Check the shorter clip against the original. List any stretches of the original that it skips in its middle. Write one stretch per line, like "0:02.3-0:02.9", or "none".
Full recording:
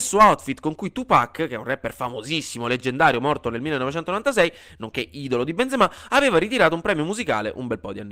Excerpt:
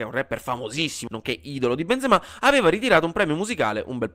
0:02.6-0:04.8

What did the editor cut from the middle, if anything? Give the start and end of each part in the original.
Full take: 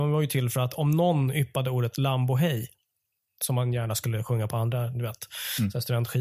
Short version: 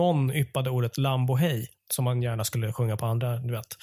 0:02.8-0:03.3

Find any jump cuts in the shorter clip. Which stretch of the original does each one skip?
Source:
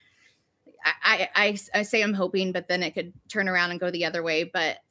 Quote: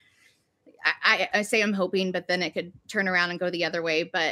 0:01.3-0:01.7

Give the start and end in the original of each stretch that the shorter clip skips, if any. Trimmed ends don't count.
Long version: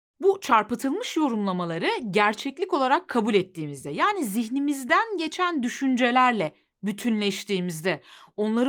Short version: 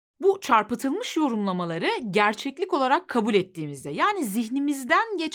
none

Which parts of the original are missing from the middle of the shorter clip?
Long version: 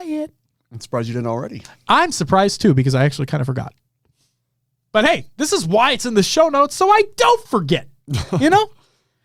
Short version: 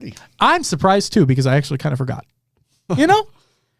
0:04.4-0:08.3

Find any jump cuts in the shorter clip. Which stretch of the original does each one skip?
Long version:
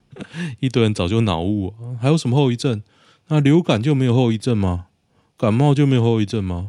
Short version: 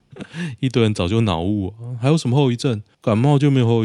0:02.9-0:05.3

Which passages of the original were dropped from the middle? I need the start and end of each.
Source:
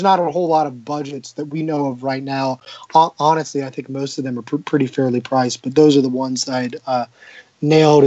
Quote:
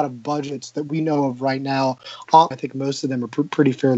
0:03.1-0:03.6

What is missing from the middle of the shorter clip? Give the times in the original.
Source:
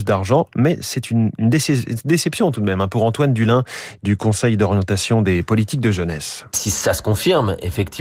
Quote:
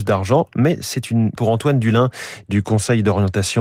0:01.4-0:02.9

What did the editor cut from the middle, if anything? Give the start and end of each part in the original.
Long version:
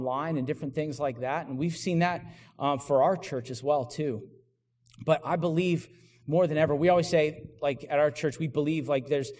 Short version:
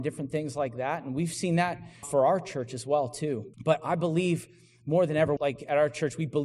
0:02.5-0:02.8
0:04.3-0:04.9
0:06.8-0:07.6

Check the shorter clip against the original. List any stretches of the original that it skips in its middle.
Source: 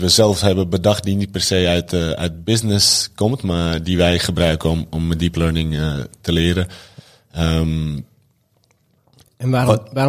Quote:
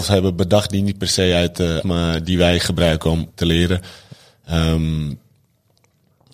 0:02.1-0:03.4
0:04.9-0:06.1

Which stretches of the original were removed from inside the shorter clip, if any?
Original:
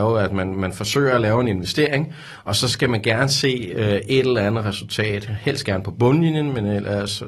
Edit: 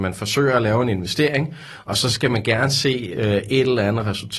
none

